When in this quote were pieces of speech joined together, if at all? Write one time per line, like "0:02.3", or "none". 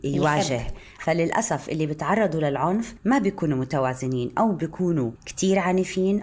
0:01.0